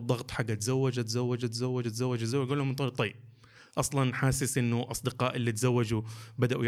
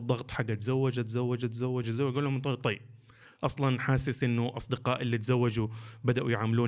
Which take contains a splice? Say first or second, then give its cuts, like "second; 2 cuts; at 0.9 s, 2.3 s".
second; 1 cut; at 1.8 s